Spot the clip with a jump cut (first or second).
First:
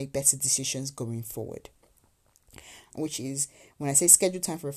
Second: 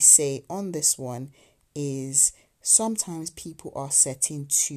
first